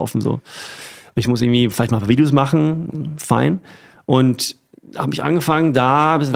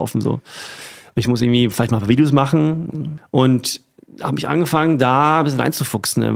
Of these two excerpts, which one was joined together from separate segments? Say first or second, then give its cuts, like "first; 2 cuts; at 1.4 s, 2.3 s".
second; 1 cut; at 3.2 s